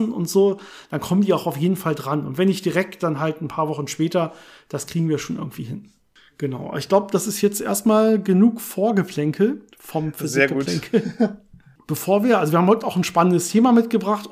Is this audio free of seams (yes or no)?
no